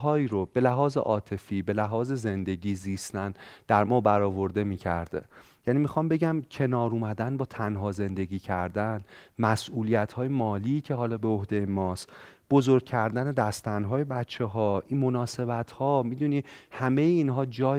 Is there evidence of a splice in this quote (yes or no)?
no